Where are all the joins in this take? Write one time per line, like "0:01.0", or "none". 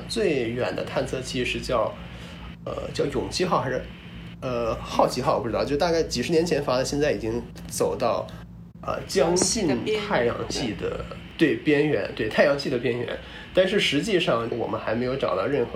0:14.5